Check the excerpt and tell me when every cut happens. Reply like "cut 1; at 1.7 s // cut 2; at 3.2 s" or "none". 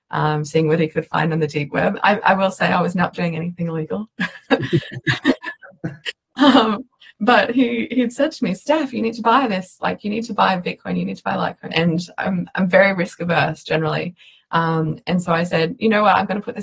cut 1; at 11.7 s